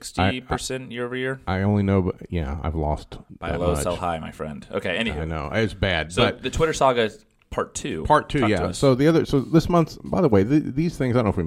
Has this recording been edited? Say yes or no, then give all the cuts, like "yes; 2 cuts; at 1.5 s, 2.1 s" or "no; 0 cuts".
no; 0 cuts